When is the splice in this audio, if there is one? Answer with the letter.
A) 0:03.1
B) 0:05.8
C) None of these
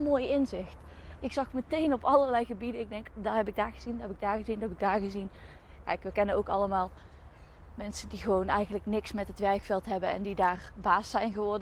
A